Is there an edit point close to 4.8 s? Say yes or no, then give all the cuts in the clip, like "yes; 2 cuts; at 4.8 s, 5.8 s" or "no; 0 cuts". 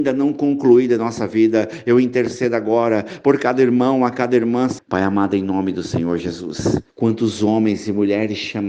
yes; 2 cuts; at 4.8 s, 6.9 s